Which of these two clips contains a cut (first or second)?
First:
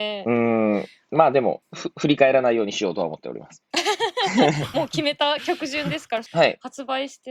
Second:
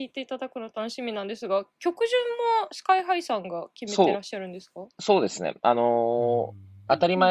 first